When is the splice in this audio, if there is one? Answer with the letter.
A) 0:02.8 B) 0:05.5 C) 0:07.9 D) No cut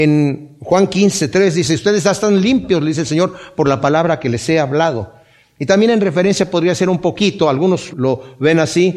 C